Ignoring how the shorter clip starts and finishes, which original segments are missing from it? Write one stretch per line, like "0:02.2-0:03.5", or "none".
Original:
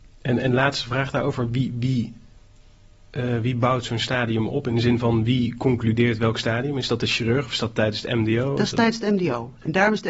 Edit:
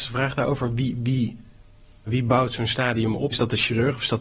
0:02.8-0:03.4
0:04.6-0:06.8